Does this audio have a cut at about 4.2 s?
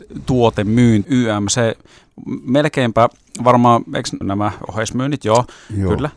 yes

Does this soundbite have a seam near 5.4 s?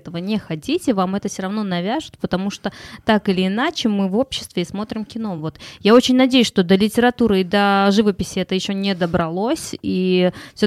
no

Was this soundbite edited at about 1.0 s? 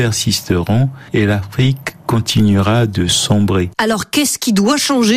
no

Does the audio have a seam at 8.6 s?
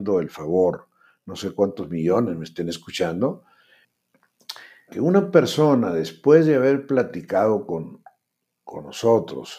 no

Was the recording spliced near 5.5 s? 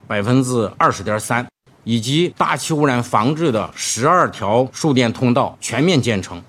no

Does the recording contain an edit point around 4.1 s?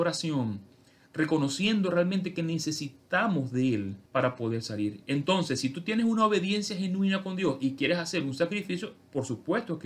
yes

